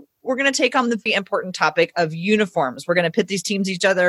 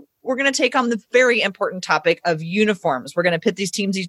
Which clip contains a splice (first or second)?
first